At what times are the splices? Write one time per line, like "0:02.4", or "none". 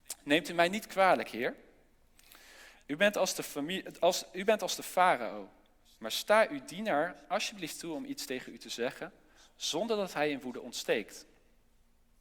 none